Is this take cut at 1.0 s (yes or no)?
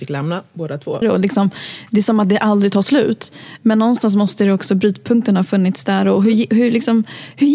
yes